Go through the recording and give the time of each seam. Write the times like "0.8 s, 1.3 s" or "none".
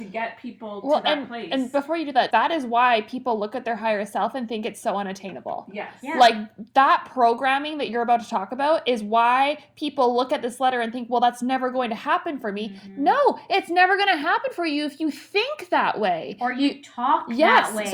2.3 s